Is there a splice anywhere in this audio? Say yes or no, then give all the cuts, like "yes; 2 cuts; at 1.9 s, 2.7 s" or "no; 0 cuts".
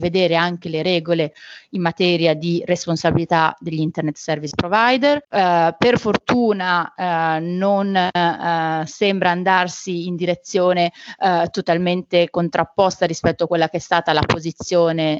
yes; 1 cut; at 5.2 s